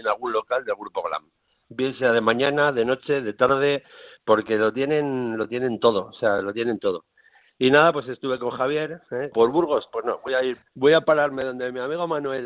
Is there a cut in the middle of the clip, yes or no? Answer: yes